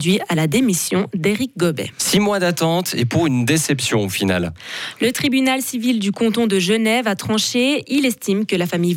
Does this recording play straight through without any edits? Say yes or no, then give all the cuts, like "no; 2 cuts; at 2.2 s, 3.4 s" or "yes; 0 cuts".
yes; 0 cuts